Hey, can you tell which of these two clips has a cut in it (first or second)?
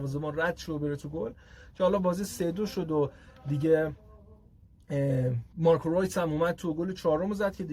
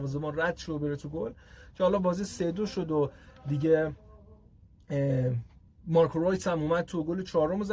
first